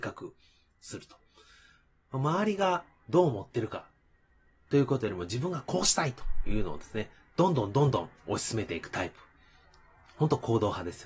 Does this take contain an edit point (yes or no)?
no